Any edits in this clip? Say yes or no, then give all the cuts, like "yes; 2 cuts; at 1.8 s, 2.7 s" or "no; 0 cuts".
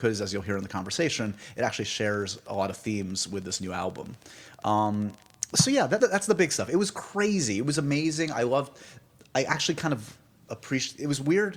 yes; 1 cut; at 6.0 s